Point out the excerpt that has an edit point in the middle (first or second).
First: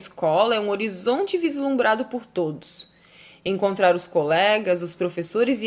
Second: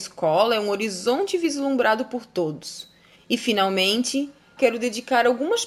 second